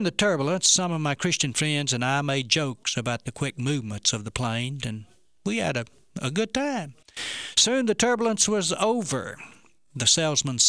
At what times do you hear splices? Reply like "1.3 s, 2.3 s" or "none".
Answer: 4.8 s